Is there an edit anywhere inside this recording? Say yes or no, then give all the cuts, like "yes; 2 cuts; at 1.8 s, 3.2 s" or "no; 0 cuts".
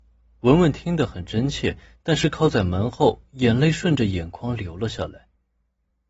no; 0 cuts